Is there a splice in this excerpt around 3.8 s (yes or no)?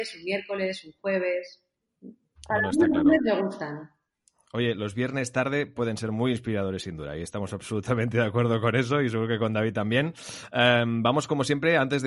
no